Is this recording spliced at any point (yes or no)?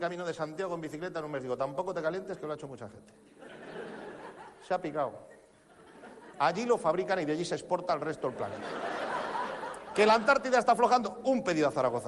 yes